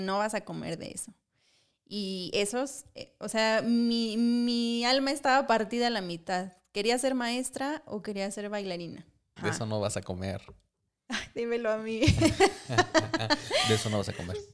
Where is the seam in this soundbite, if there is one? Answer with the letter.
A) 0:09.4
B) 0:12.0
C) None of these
A